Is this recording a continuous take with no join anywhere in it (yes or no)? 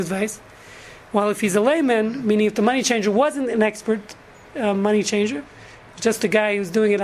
yes